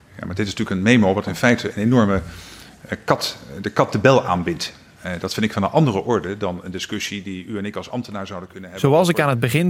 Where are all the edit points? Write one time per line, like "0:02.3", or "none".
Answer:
none